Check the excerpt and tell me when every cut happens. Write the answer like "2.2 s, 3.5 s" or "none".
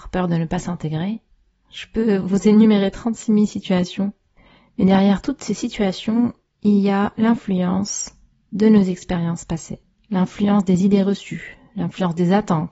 none

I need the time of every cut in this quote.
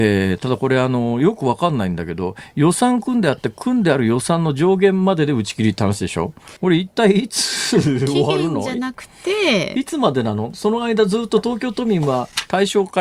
6.6 s

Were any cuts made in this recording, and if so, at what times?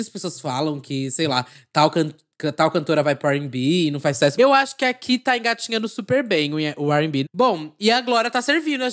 4.4 s, 7.2 s

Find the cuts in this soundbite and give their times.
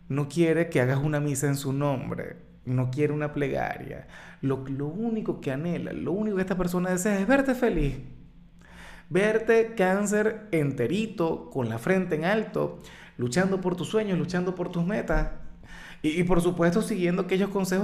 none

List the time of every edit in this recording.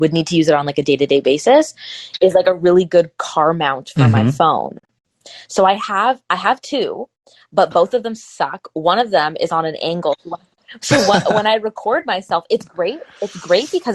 none

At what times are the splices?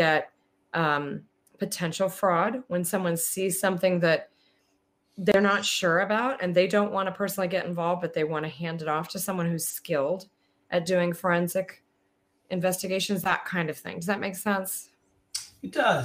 none

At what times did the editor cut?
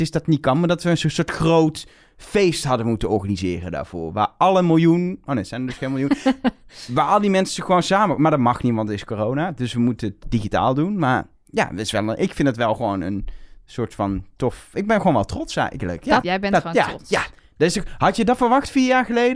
16.2 s

